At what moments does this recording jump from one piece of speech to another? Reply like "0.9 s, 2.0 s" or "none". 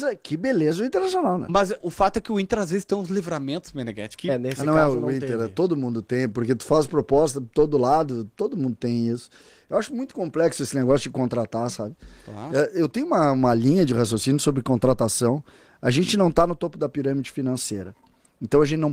1.8 s